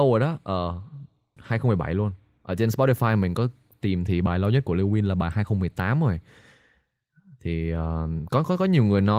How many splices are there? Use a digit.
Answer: 1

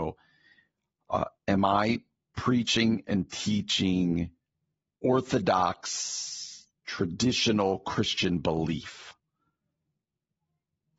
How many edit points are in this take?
2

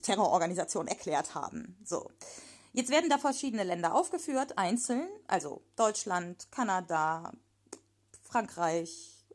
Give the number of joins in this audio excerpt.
0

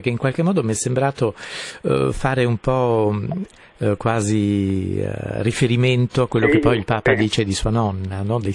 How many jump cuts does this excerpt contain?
0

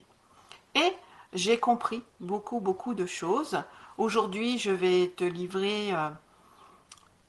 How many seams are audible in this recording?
0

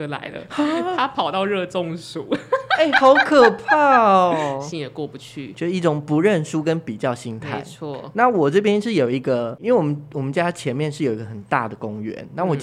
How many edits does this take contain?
1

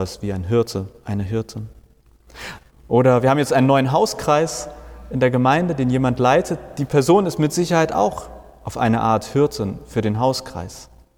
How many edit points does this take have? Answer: 1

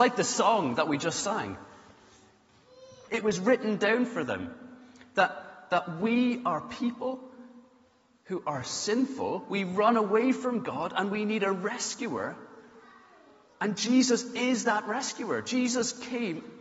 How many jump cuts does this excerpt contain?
1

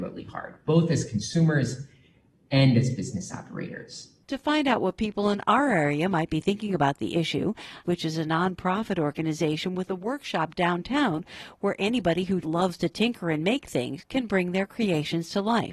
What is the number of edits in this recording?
3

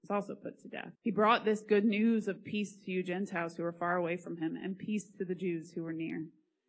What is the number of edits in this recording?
1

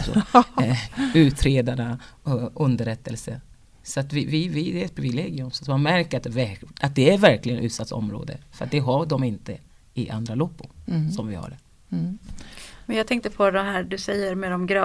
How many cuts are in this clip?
0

